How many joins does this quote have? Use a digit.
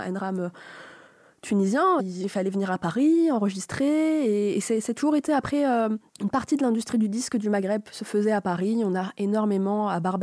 2